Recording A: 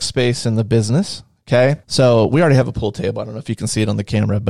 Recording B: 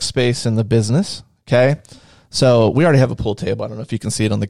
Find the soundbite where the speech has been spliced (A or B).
A